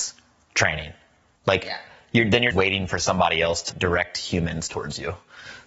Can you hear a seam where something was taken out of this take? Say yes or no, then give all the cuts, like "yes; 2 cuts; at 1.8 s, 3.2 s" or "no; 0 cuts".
yes; 3 cuts; at 1.3 s, 2.5 s, 3.7 s